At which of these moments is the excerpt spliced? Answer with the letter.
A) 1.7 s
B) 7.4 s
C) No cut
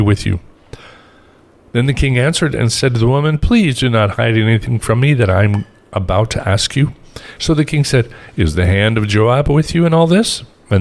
B